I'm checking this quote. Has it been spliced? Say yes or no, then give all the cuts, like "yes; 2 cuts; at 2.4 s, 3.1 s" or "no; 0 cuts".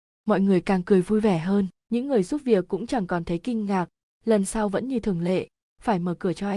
yes; 1 cut; at 1.8 s